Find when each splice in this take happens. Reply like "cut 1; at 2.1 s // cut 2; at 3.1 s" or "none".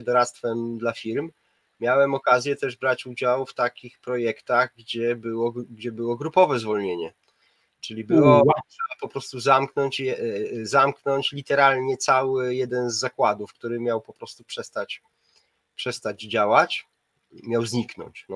none